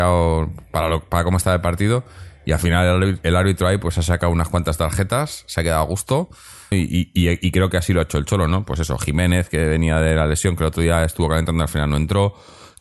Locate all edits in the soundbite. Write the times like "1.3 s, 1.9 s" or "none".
6.7 s